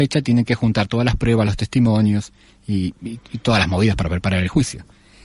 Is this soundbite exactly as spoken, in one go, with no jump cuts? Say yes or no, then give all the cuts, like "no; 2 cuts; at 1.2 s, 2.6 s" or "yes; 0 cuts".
yes; 0 cuts